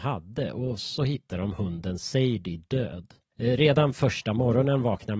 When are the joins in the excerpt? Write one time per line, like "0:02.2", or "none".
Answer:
0:03.3